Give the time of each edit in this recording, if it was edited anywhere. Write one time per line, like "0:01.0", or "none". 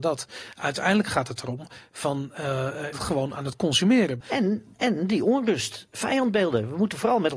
0:02.9
0:04.2